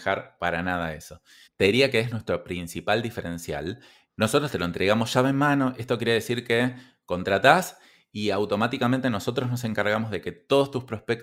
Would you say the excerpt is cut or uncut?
cut